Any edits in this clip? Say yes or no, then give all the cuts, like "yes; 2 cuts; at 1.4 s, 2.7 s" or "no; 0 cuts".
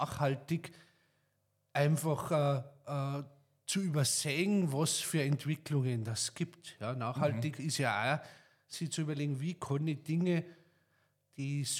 no; 0 cuts